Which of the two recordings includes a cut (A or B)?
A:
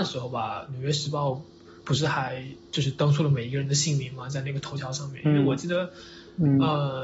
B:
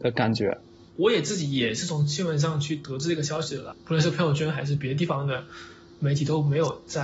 B